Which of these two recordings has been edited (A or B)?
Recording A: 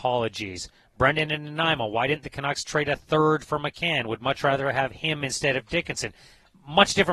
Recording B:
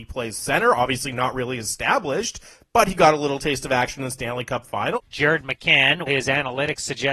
B